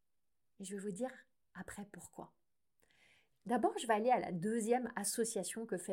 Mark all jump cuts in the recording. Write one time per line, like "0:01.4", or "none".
none